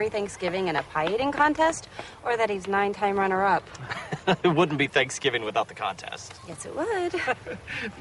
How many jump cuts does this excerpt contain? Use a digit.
0